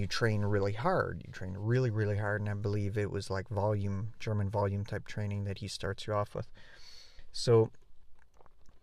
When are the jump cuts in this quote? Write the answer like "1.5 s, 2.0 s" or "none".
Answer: none